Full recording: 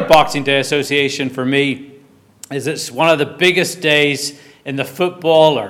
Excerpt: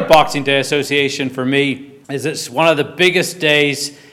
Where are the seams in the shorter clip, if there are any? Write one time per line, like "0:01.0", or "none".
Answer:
0:02.0